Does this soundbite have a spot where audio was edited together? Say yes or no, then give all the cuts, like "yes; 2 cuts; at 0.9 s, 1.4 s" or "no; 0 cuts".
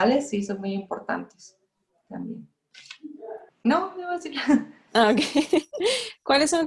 yes; 1 cut; at 3.5 s